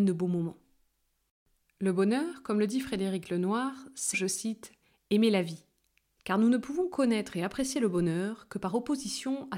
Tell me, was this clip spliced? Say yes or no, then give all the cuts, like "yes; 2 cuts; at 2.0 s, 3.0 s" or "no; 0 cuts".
yes; 2 cuts; at 4.1 s, 6.2 s